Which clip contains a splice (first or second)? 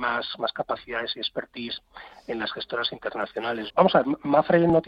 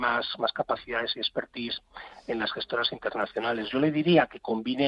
first